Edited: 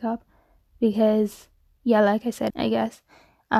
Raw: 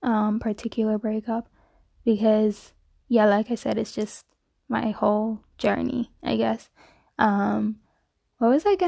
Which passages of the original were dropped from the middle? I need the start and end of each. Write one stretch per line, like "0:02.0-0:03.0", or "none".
0:03.7-0:06.2